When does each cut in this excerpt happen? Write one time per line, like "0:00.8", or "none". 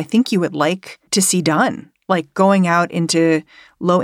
0:01.1